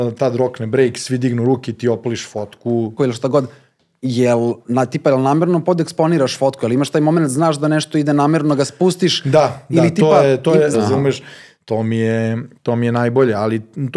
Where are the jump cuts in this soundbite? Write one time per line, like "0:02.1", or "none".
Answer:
0:03.0
0:10.7